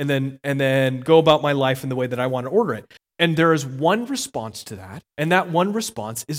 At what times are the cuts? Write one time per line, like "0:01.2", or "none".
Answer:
0:03.0
0:05.1